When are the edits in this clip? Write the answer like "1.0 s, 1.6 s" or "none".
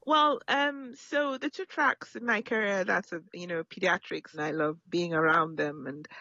3.3 s, 4.3 s